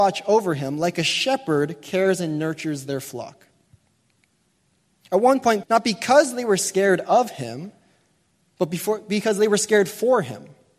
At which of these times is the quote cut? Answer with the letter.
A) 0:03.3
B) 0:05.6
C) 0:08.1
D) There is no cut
B